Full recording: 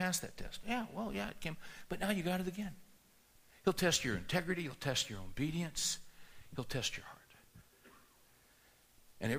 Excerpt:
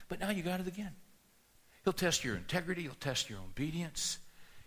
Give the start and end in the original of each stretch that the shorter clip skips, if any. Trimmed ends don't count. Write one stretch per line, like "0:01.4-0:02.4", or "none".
none